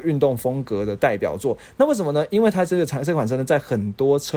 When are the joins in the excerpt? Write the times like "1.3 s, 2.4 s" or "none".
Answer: none